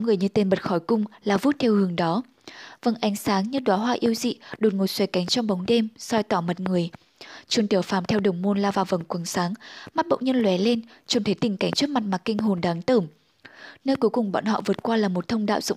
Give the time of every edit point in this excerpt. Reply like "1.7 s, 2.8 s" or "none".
none